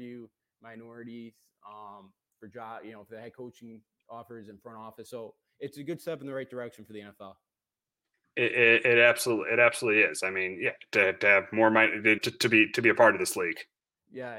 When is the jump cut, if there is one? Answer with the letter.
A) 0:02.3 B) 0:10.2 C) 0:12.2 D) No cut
C